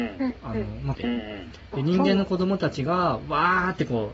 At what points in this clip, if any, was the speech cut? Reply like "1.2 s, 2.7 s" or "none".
0.9 s

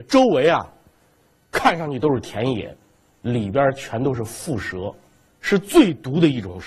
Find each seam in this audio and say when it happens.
5.3 s

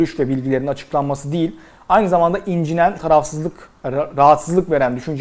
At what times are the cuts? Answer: 3.0 s

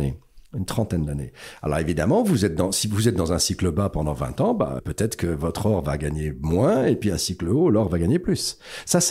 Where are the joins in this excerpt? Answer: 4.8 s

